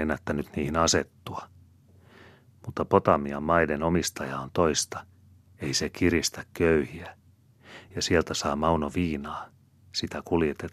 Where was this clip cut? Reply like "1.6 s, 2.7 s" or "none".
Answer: none